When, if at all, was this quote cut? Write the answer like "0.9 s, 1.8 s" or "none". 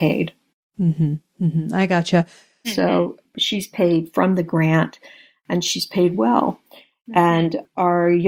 2.6 s